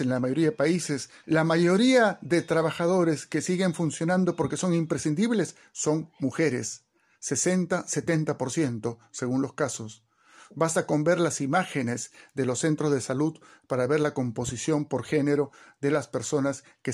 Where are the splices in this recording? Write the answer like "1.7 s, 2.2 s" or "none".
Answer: 1.2 s